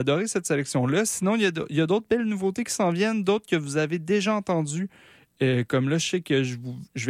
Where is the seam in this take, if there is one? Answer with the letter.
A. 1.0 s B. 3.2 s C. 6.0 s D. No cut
D